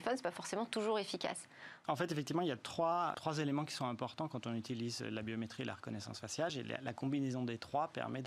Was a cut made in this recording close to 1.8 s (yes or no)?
yes